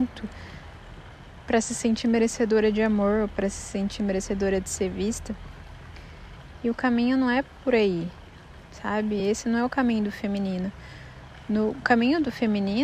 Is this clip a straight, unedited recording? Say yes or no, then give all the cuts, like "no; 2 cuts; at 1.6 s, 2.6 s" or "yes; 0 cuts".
yes; 0 cuts